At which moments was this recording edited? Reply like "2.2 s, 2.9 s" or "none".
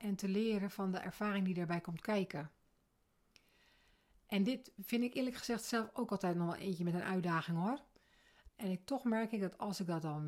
8.5 s